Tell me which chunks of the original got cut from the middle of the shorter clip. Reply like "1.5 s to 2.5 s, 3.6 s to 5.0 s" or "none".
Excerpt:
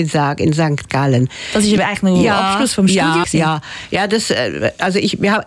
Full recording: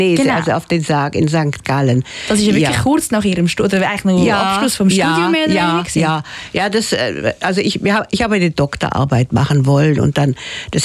2.5 s to 3.8 s, 5.3 s to 5.9 s